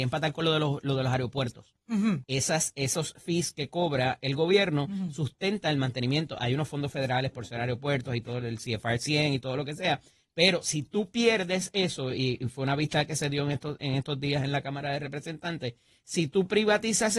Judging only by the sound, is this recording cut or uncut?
cut